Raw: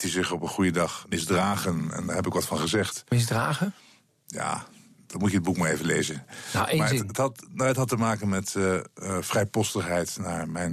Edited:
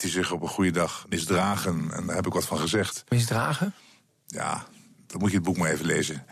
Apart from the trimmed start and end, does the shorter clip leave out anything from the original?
no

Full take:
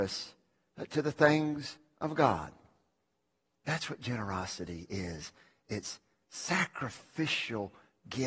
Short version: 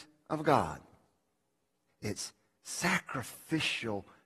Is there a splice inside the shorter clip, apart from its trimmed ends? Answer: yes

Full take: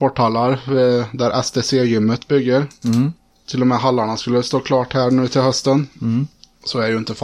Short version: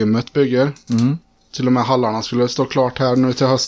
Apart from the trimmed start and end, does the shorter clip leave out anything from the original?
no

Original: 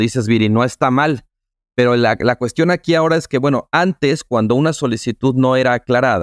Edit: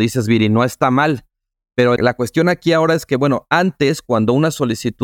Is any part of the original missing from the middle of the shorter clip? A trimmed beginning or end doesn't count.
yes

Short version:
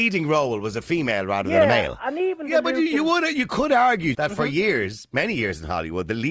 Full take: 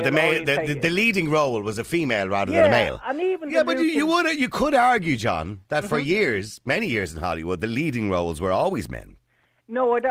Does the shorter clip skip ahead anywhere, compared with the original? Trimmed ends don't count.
yes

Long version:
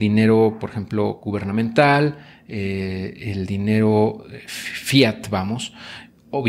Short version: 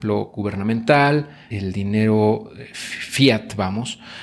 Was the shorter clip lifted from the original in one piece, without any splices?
no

